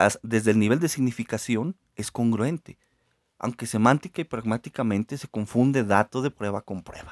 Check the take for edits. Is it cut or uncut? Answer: uncut